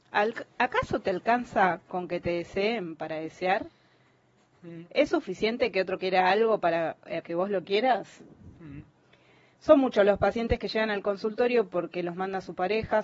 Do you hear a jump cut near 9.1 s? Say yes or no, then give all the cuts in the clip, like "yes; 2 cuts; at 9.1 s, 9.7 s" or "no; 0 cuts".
no; 1 cut; at 7.2 s